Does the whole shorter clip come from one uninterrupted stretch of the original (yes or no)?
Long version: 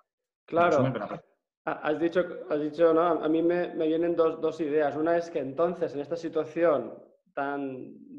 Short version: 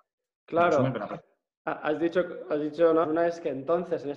no